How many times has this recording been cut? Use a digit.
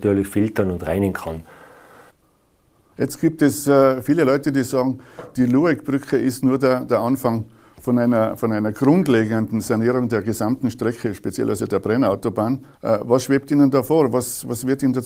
1